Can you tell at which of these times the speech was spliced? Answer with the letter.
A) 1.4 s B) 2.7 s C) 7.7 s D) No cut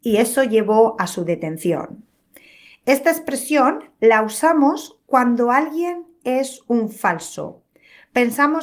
D